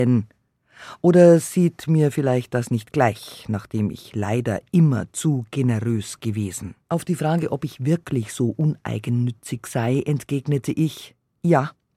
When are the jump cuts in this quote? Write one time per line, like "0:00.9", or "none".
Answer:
0:06.8

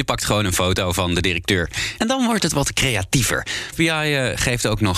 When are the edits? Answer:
0:02.0
0:03.7

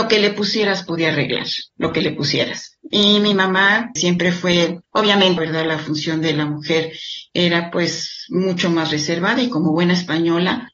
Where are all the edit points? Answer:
0:04.0
0:05.4

